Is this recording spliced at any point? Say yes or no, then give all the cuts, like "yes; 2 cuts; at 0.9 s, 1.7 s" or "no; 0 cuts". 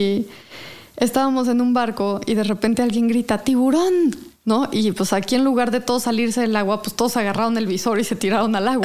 no; 0 cuts